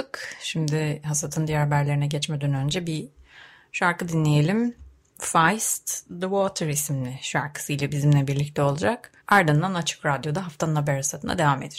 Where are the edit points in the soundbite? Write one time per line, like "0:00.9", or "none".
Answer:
0:09.2